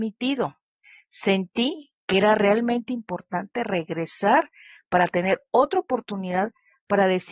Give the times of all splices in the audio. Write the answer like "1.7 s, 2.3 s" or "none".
none